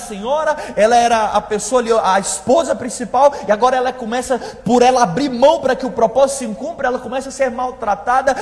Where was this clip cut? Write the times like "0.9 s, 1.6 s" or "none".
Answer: none